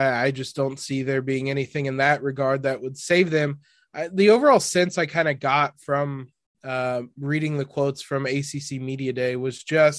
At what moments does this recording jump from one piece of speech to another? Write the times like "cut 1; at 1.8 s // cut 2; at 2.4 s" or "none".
none